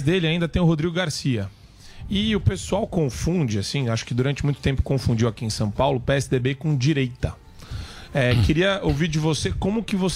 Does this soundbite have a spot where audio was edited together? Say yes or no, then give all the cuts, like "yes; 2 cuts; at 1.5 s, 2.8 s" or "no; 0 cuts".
no; 0 cuts